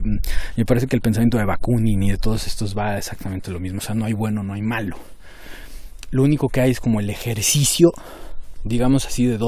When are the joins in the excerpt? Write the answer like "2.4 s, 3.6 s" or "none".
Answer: none